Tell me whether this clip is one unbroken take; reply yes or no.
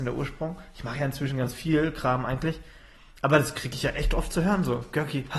yes